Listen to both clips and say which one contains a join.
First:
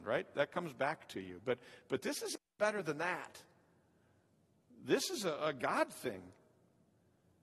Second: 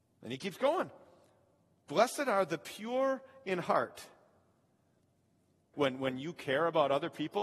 second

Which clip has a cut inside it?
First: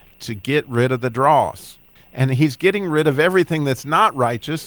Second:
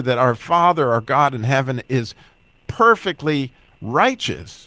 first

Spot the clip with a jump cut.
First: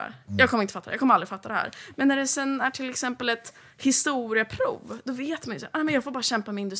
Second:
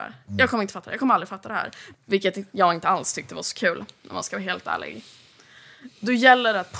second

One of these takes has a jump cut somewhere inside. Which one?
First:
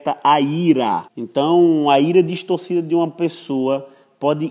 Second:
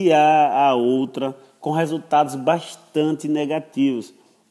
first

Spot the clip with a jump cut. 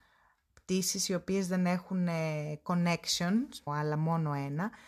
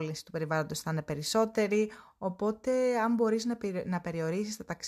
first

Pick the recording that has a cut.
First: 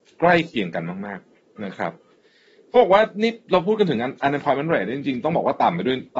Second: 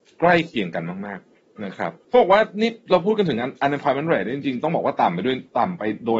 second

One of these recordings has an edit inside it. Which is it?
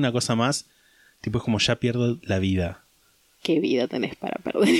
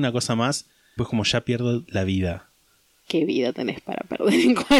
second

